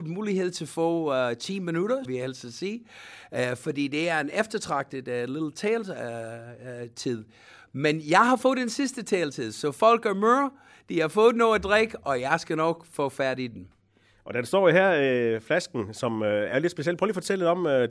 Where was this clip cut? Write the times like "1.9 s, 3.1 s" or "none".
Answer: 2.1 s